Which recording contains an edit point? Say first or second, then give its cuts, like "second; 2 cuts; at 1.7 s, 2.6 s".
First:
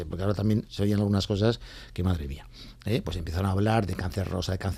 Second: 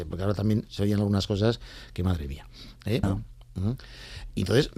second; 1 cut; at 3.0 s